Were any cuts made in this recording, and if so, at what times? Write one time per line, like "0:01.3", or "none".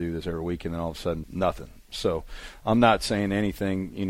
0:01.2